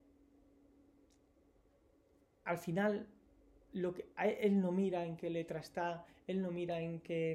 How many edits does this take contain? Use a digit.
0